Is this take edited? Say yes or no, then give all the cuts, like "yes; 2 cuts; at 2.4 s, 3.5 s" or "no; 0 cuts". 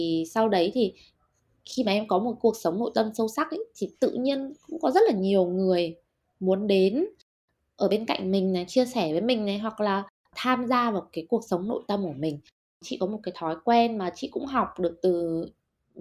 no; 0 cuts